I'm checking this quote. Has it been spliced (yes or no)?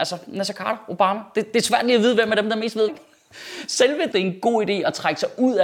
yes